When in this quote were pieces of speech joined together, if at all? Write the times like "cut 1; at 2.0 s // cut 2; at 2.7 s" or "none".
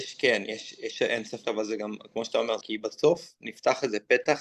cut 1; at 1.4 s // cut 2; at 2.6 s